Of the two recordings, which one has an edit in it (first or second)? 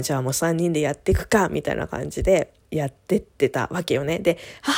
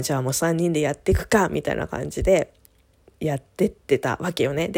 first